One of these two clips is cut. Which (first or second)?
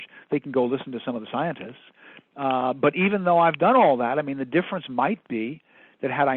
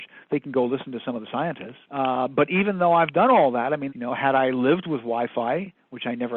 second